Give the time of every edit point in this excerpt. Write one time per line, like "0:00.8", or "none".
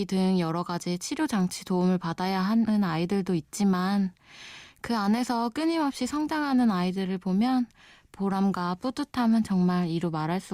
none